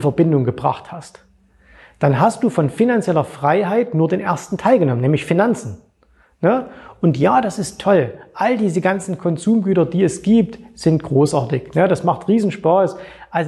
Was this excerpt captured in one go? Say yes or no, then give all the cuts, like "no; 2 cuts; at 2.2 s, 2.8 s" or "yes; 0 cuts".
yes; 0 cuts